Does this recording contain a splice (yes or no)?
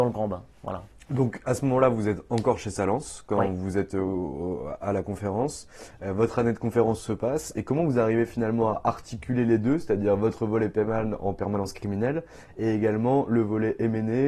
no